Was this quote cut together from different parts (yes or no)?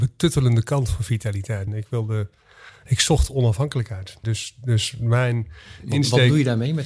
yes